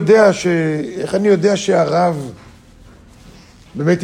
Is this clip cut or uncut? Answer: uncut